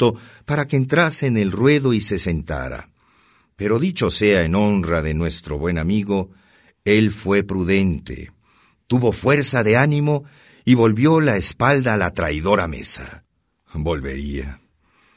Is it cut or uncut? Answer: uncut